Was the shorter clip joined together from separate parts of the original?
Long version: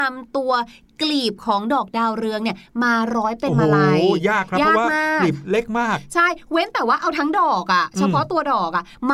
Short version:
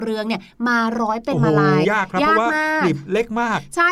yes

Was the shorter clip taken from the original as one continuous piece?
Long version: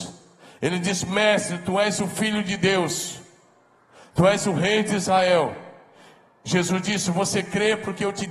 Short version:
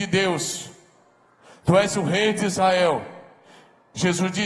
yes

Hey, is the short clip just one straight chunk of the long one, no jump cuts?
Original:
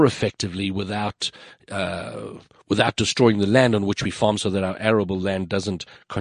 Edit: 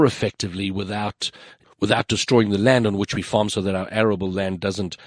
no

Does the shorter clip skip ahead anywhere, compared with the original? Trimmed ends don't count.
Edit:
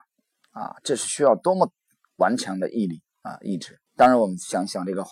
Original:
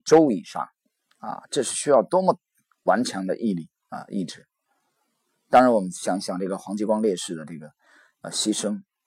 yes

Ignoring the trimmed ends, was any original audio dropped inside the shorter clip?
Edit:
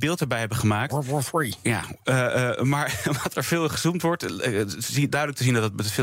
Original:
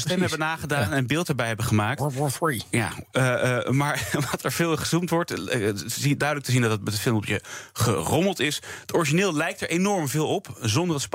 no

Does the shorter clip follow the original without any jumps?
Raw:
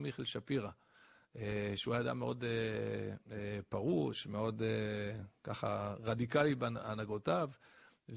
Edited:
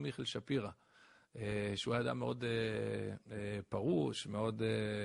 yes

